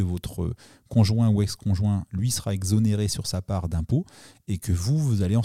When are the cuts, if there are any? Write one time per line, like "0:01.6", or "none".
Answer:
none